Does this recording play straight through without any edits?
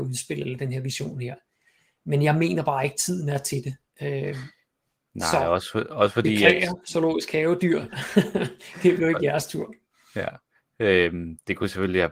yes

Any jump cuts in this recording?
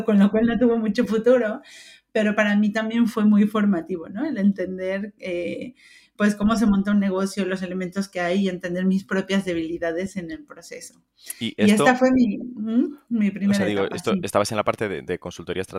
no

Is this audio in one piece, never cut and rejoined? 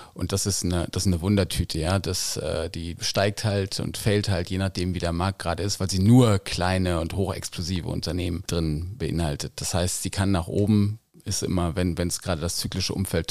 yes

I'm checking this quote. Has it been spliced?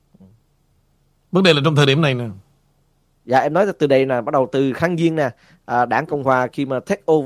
no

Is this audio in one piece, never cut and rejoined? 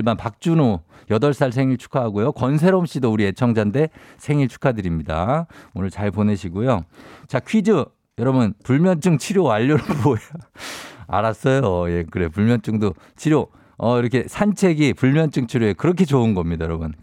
no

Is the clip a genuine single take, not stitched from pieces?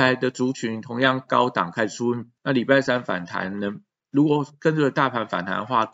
no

